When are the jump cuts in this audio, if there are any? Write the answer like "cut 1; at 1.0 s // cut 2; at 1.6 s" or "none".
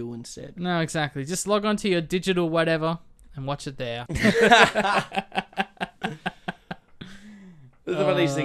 cut 1; at 4.1 s